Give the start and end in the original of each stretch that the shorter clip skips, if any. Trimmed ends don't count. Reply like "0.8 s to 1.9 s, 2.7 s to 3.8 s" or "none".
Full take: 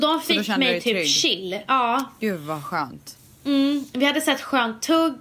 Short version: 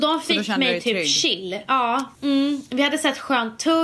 2.2 s to 3.4 s